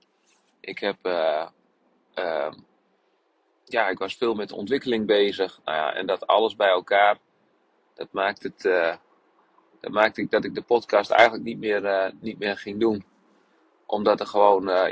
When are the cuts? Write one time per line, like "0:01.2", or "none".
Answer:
none